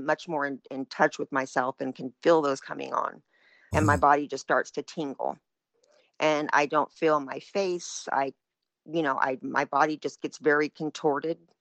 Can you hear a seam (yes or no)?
yes